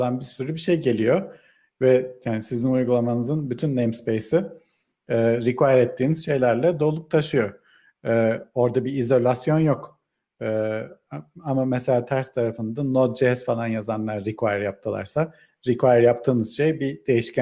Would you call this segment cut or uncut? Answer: uncut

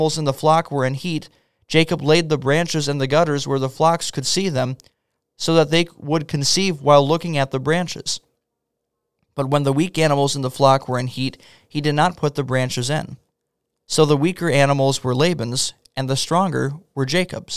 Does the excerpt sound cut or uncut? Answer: uncut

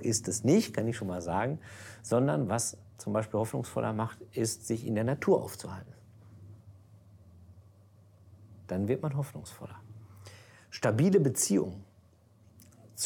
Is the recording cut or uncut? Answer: uncut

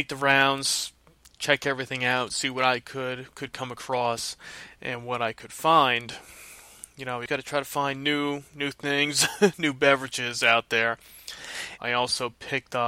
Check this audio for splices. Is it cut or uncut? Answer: cut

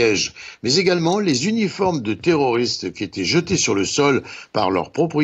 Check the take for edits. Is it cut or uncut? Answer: uncut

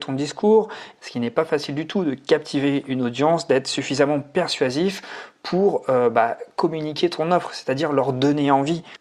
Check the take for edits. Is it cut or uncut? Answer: cut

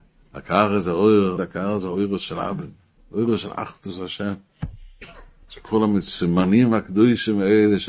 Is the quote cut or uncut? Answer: cut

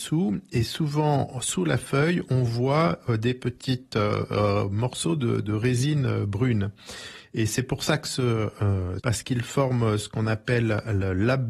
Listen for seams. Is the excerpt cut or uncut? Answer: cut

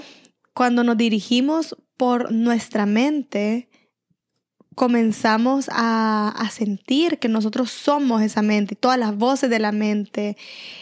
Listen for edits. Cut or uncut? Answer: uncut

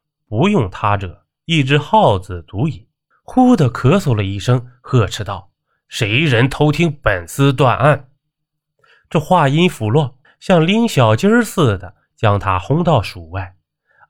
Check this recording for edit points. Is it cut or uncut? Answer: cut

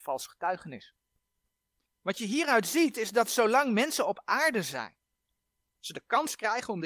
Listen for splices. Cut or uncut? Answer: cut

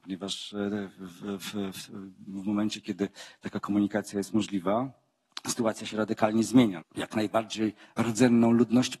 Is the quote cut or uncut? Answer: cut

